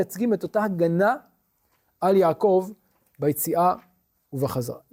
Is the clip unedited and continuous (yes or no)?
yes